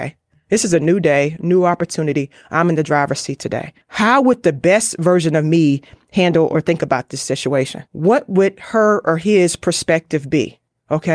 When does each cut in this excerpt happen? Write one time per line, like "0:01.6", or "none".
0:03.8
0:07.9